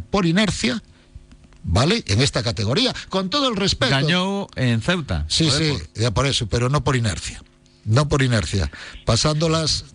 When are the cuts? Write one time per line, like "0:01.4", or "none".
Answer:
none